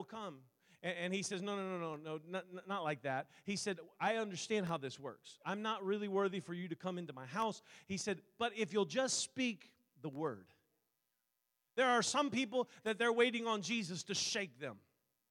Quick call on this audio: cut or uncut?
uncut